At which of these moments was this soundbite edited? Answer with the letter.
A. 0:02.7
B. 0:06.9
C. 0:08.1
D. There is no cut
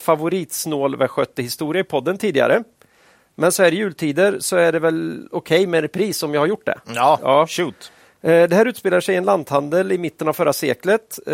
D